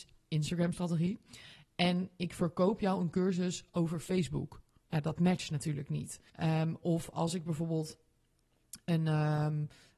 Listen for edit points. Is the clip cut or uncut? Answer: cut